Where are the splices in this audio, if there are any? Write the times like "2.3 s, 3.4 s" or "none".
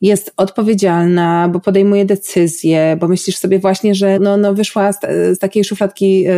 4.2 s